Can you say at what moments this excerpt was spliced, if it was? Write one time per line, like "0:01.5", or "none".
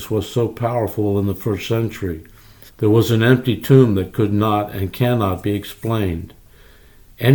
0:02.7

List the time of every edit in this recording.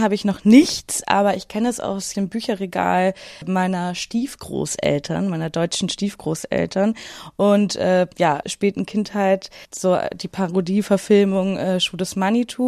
0:08.4

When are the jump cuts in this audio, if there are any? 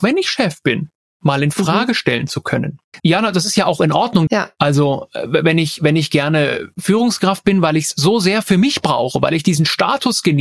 0:03.0
0:04.3

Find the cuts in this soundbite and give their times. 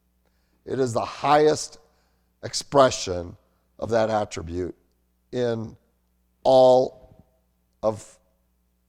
none

